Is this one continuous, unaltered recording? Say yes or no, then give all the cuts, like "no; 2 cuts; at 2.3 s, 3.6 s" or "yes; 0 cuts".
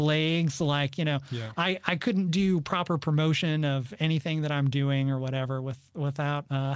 yes; 0 cuts